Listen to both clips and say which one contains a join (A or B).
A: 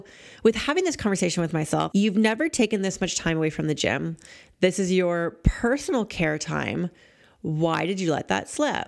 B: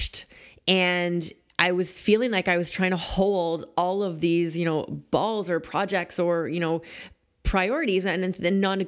A